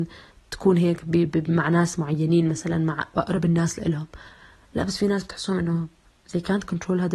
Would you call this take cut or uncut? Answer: cut